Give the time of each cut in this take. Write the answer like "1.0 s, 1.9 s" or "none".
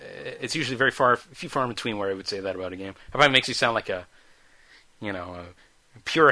none